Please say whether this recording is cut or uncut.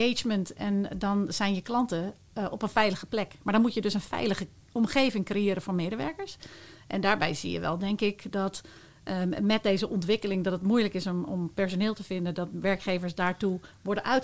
uncut